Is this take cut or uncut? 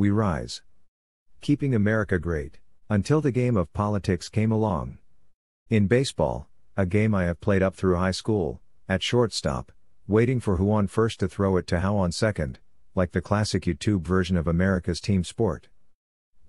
cut